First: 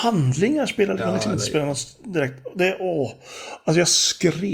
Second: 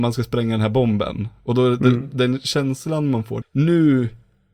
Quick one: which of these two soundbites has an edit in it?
second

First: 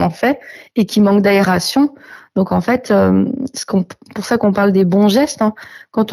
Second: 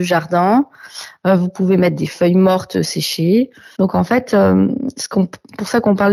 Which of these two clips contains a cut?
second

